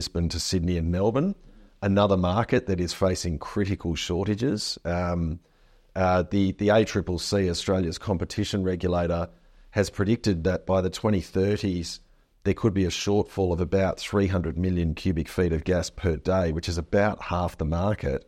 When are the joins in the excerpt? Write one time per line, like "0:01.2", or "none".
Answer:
none

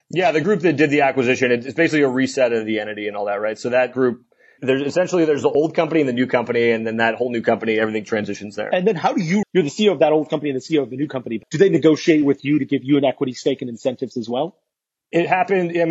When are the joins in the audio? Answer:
0:09.4
0:11.4

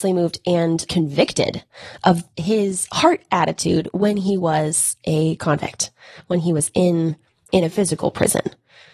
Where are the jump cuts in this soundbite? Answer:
none

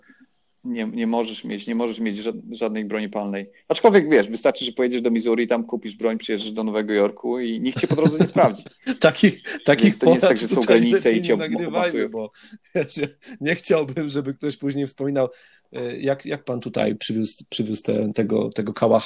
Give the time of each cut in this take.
none

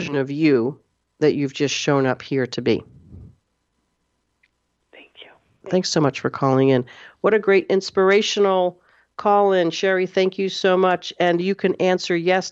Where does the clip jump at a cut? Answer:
0:05.6

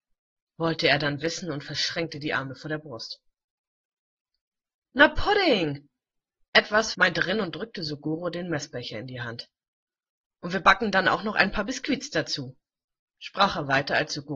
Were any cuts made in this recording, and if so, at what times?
0:06.9

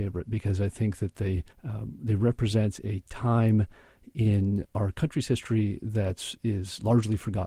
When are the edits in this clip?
0:01.5
0:04.6

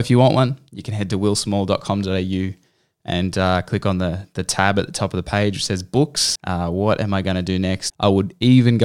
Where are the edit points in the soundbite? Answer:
0:06.4
0:07.9

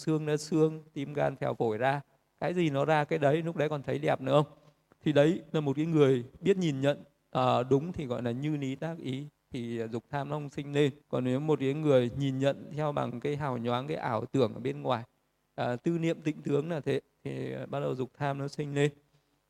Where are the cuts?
0:11.0

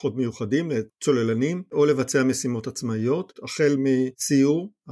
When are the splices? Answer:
0:03.3

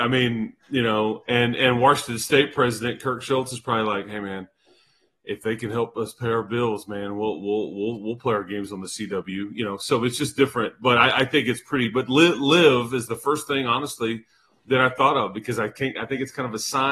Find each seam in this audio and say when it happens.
none

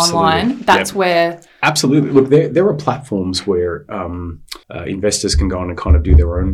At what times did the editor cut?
0:04.6

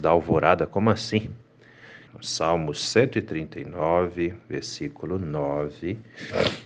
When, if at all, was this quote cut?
0:02.1

